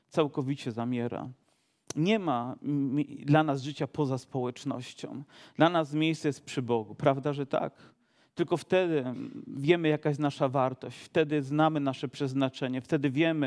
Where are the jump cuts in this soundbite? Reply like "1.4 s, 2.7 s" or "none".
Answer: none